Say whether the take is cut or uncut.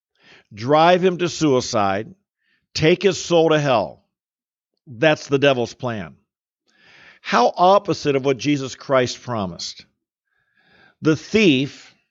uncut